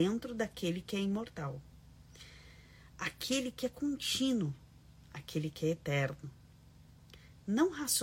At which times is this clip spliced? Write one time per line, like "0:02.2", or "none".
none